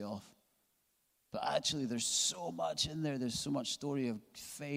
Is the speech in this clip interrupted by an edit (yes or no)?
no